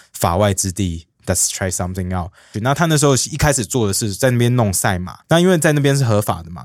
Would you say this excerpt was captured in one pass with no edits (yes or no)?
no